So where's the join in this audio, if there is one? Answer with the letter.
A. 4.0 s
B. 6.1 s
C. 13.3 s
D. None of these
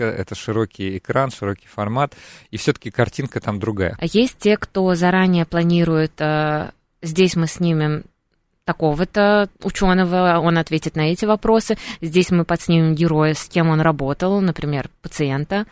A